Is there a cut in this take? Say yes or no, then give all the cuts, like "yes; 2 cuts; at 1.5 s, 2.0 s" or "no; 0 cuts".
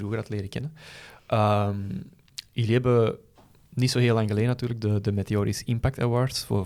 no; 0 cuts